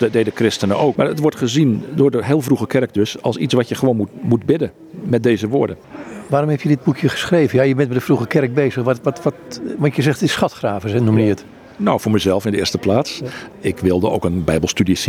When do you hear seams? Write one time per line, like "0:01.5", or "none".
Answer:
0:01.0
0:13.5